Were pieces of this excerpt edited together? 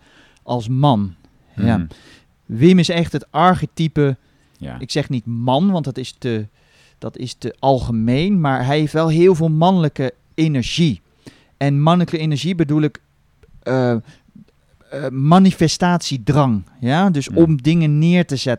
no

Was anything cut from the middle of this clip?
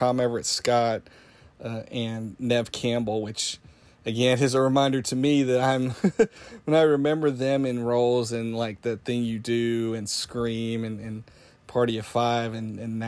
no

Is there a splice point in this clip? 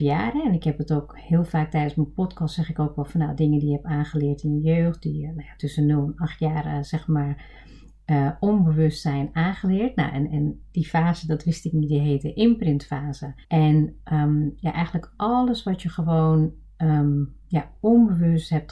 yes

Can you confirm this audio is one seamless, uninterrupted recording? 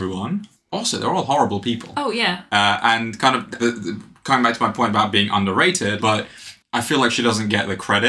no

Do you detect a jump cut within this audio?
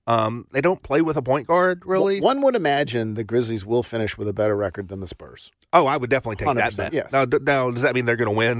yes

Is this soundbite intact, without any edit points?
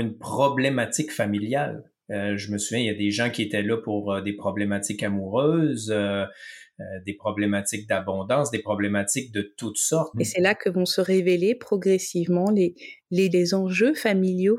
no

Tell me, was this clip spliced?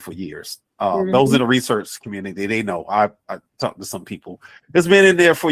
no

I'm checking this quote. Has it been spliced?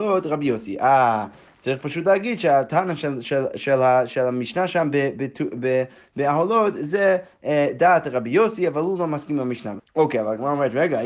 yes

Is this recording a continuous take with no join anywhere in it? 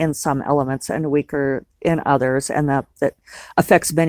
yes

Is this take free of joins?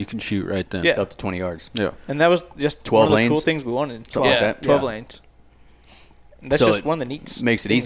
yes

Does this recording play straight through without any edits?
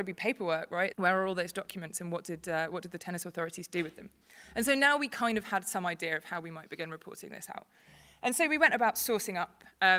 no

